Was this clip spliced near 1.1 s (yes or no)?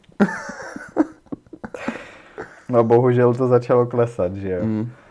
no